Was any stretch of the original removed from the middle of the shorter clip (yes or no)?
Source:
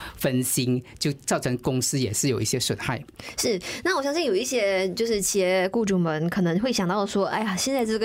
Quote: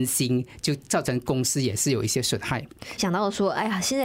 yes